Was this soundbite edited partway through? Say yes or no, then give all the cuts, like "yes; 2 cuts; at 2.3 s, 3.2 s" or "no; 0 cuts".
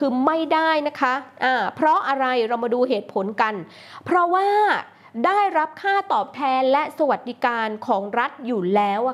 no; 0 cuts